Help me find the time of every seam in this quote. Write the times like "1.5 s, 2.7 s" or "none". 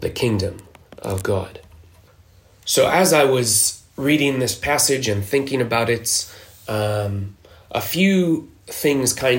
none